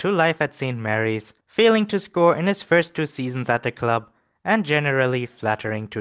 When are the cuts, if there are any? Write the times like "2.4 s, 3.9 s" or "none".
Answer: 1.4 s